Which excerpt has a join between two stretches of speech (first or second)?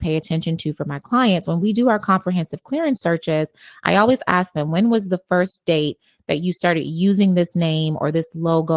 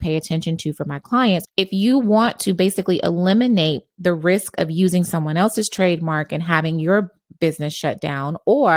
second